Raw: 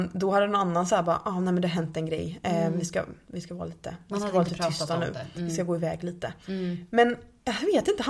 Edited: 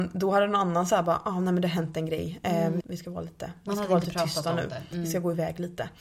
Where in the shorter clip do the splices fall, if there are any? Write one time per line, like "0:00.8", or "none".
0:02.8